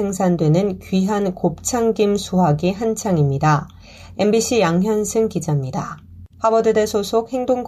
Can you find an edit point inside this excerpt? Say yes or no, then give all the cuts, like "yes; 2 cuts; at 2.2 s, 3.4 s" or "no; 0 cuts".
yes; 2 cuts; at 4.1 s, 6.3 s